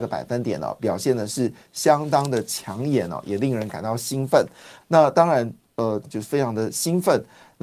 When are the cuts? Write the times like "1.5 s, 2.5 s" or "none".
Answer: 4.8 s, 6.0 s